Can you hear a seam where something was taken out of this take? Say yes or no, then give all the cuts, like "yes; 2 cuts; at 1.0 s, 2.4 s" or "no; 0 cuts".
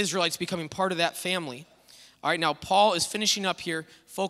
no; 0 cuts